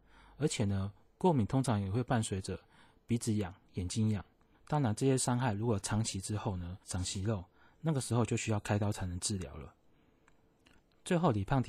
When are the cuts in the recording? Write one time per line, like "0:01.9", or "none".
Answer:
0:04.5
0:06.8

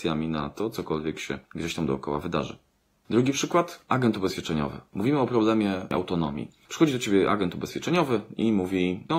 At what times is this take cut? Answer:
none

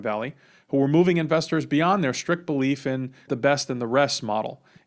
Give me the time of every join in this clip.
0:03.3

